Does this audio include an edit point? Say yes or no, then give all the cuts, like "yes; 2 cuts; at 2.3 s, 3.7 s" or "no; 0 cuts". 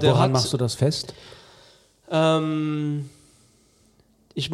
no; 0 cuts